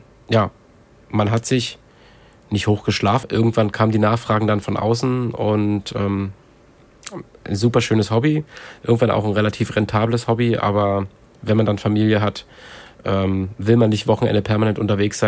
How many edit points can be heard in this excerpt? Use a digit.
1